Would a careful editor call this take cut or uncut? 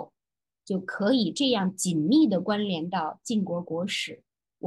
uncut